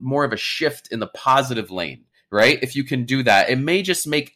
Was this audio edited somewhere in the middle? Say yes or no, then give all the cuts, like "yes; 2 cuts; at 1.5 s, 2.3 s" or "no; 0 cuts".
no; 0 cuts